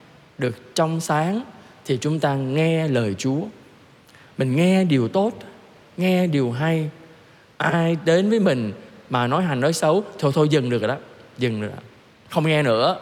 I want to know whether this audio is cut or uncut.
uncut